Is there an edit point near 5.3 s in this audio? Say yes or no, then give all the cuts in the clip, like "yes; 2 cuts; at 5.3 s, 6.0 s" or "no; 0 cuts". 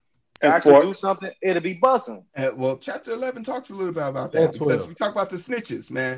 no; 1 cut; at 2.3 s